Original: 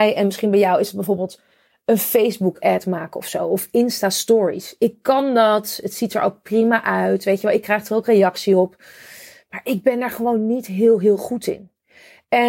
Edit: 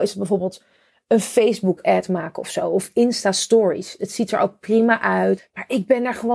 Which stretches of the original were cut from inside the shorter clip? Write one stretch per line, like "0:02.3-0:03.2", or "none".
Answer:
0:04.8-0:05.8
0:07.2-0:09.3